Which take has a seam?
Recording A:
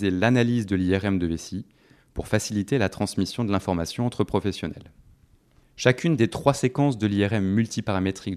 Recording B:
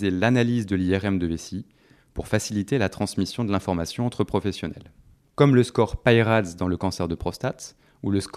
B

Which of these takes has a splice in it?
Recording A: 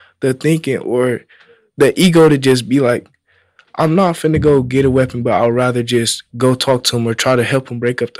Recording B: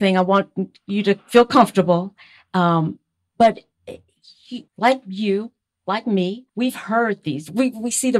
B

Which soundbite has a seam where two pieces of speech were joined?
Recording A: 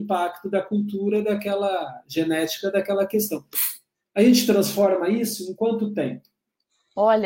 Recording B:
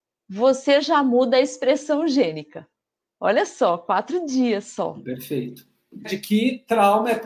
B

